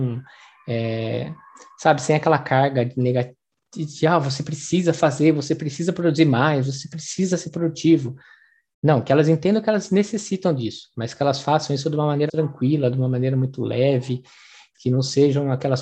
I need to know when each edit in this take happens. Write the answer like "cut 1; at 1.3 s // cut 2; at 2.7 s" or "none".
cut 1; at 12.3 s // cut 2; at 14.7 s